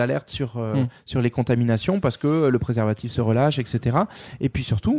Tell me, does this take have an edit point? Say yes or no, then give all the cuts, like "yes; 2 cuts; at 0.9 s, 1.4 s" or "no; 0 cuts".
no; 0 cuts